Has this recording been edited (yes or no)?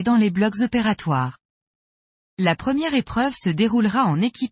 yes